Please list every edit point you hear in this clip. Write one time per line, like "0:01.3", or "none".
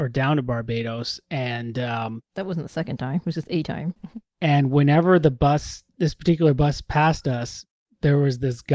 0:04.0

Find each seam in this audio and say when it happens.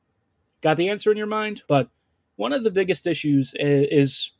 0:01.7

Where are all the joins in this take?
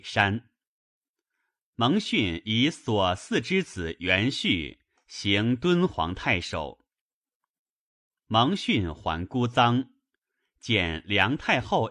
none

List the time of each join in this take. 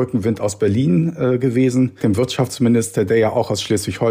0:02.0

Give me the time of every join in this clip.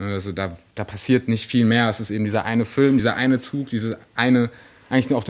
none

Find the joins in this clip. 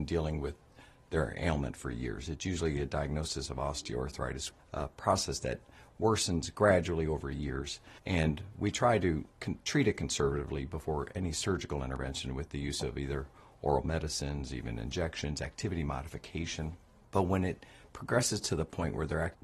0:04.6
0:08.0

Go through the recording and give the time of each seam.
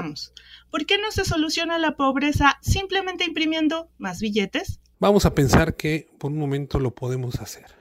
0:04.9

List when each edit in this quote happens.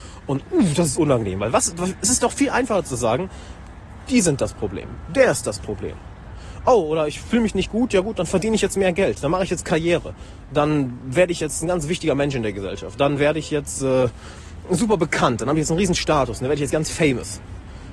none

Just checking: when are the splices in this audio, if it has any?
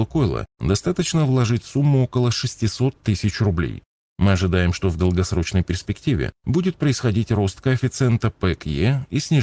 none

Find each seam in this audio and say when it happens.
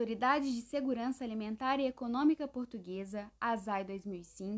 none

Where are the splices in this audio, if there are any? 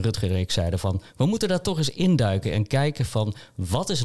none

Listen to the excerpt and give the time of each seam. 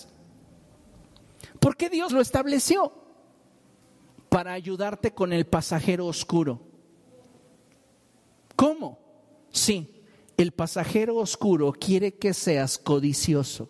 0:02.1

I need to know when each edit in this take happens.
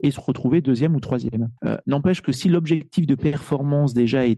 0:01.6

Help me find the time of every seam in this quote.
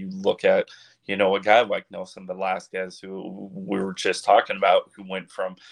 none

